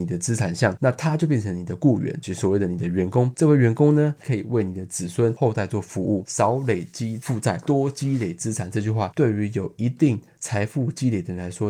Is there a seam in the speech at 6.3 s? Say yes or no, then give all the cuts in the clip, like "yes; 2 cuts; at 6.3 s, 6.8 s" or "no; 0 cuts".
no; 1 cut; at 4.2 s